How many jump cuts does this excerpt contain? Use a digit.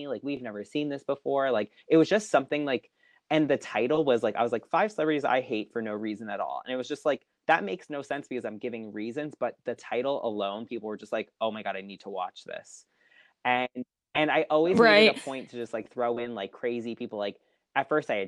0